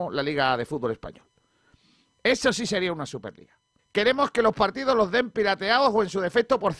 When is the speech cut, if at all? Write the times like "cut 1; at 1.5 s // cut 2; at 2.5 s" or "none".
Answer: cut 1; at 3.8 s